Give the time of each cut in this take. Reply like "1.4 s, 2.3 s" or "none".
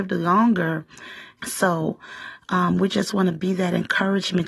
1.4 s

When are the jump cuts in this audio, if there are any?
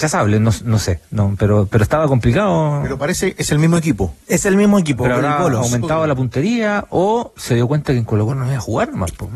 4.2 s

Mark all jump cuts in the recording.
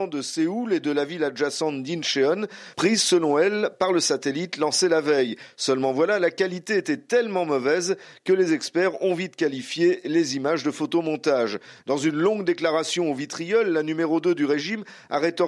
none

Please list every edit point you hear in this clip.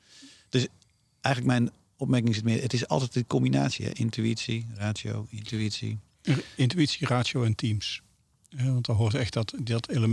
none

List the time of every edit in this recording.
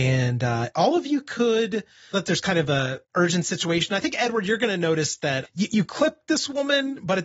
2.1 s, 5.4 s

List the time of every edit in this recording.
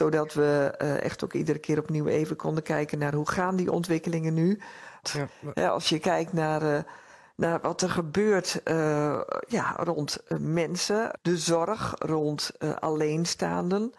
5.0 s, 11.1 s

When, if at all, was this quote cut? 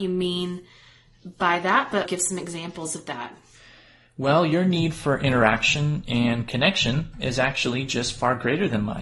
2.1 s

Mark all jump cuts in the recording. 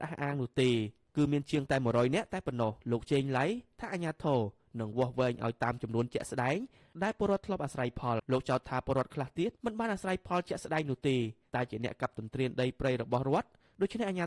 2.8 s, 8.2 s, 9.6 s

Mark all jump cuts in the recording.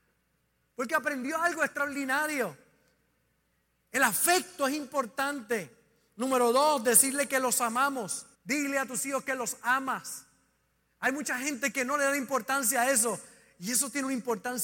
8.3 s

